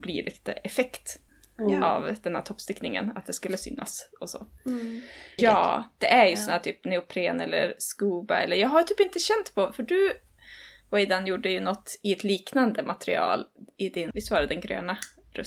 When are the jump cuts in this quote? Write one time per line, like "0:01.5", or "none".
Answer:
0:05.4
0:14.1